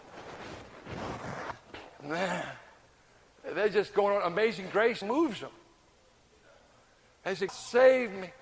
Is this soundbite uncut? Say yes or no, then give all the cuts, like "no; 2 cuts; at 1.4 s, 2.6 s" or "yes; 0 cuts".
no; 2 cuts; at 5.0 s, 7.5 s